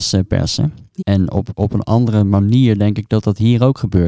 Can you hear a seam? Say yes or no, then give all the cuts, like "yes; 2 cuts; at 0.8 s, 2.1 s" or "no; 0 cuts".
yes; 1 cut; at 1.0 s